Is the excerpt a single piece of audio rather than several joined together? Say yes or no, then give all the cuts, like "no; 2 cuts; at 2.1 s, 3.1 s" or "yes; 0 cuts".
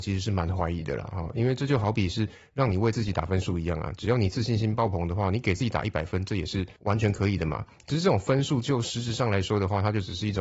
yes; 0 cuts